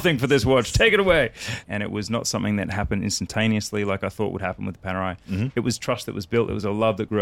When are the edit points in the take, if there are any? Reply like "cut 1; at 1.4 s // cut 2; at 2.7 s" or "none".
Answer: cut 1; at 1.6 s